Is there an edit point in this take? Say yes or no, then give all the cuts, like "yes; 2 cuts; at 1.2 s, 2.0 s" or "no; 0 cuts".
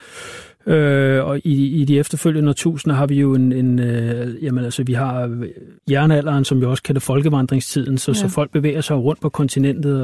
yes; 1 cut; at 5.8 s